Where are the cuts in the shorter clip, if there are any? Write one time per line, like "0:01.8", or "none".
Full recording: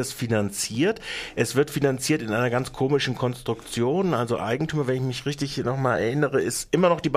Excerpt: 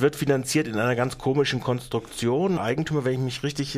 0:02.6